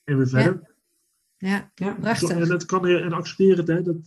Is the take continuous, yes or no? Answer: no